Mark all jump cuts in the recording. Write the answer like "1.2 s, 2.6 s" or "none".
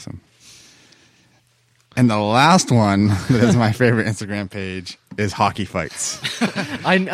none